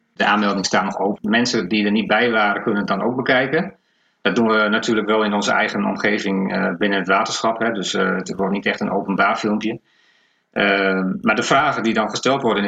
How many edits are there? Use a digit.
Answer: 1